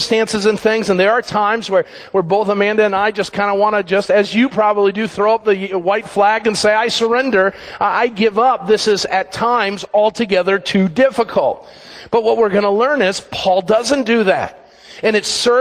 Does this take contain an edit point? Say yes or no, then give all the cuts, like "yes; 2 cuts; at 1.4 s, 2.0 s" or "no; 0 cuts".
no; 0 cuts